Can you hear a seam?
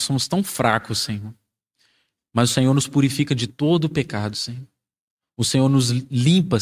no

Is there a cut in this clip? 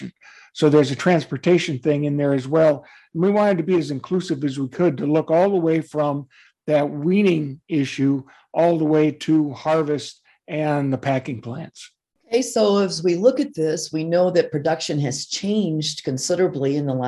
no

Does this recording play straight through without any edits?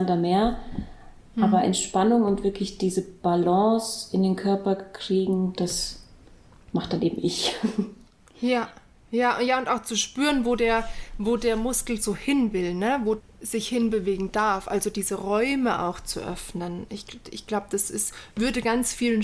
no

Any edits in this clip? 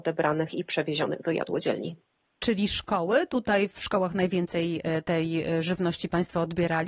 no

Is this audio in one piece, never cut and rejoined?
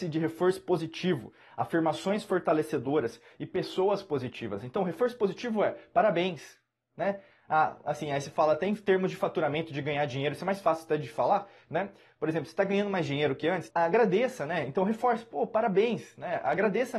no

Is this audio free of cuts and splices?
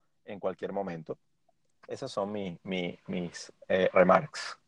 no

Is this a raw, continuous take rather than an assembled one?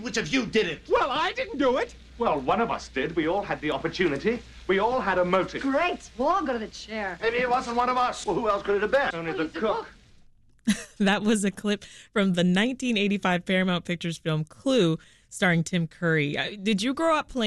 no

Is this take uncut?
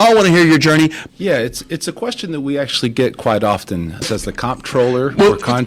no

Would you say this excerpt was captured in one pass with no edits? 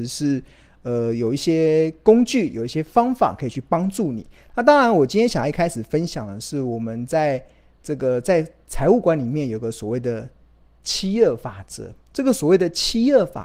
yes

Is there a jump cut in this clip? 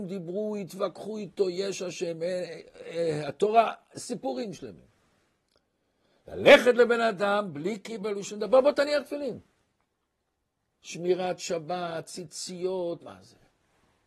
yes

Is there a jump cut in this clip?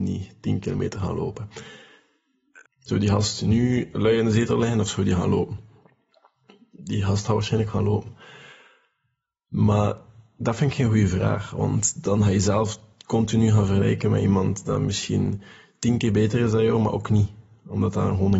yes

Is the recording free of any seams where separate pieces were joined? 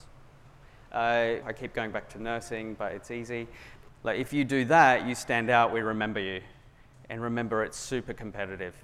no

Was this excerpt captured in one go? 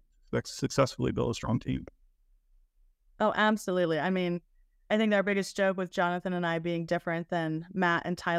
yes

